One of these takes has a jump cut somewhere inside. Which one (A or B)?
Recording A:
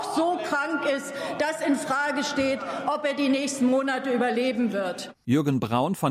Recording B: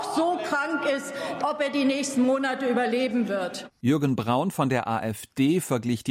B